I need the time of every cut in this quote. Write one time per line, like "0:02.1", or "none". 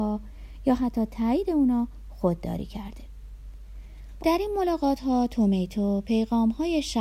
0:04.2